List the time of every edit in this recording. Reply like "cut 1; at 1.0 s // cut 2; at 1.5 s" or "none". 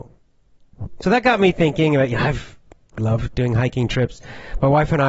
cut 1; at 1.0 s // cut 2; at 3.0 s